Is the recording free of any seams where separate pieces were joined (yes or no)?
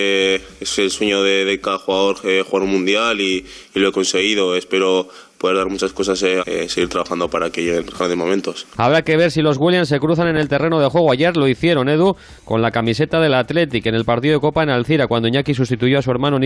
no